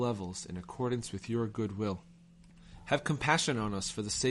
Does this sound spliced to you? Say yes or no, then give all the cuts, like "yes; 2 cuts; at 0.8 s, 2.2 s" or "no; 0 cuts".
no; 0 cuts